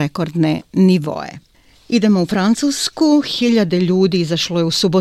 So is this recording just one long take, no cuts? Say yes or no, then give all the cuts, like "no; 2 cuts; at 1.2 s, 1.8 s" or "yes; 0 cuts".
yes; 0 cuts